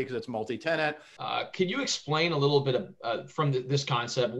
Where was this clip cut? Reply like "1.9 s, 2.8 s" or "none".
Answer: 1.2 s